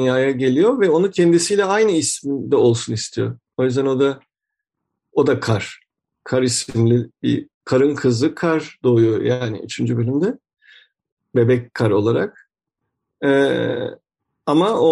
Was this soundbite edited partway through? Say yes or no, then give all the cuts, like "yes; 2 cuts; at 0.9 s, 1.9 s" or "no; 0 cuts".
no; 0 cuts